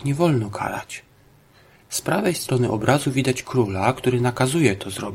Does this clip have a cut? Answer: yes; 1 cut; at 1.7 s

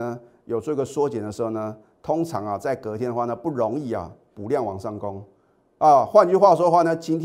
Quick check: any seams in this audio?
no; 0 cuts

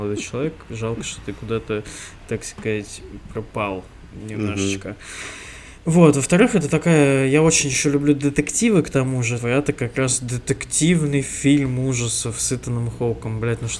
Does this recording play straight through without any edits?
no; 1 cut; at 9.4 s

